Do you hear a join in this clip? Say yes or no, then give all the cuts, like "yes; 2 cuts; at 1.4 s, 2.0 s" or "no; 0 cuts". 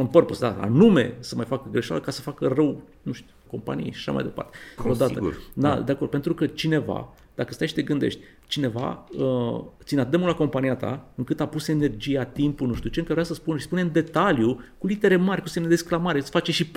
yes; 2 cuts; at 3.5 s, 4.8 s